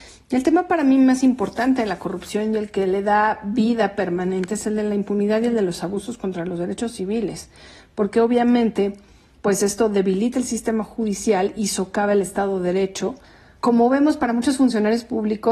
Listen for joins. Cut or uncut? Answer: uncut